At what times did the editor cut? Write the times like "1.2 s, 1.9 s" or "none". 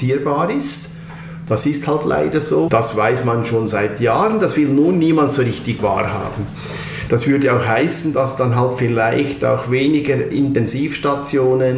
2.7 s, 7.1 s